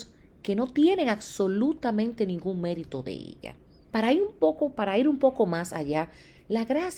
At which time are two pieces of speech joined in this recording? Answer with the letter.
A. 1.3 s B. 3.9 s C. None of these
B